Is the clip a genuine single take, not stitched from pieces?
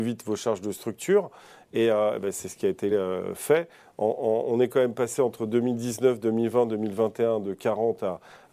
yes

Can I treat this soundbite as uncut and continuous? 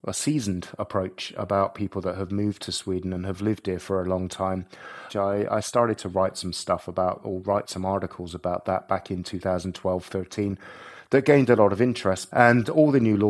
no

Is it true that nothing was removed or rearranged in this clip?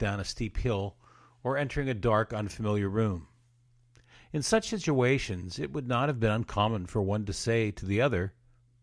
yes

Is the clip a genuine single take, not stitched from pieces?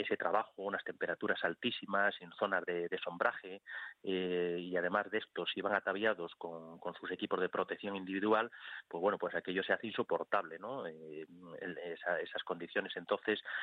yes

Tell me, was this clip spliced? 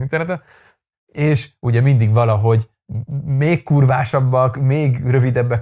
yes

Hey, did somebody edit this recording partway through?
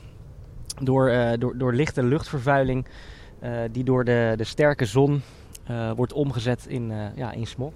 no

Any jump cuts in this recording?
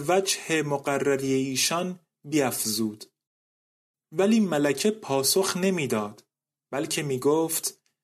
yes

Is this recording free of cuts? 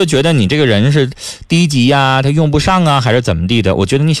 yes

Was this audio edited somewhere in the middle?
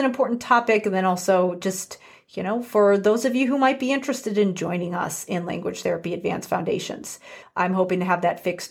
yes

